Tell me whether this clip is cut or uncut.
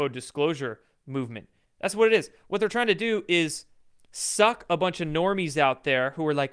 cut